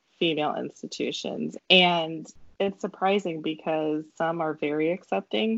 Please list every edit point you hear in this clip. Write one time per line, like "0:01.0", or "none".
0:01.6
0:04.1